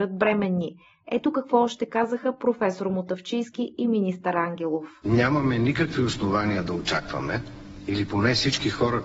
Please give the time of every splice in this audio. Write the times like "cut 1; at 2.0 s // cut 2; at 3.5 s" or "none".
none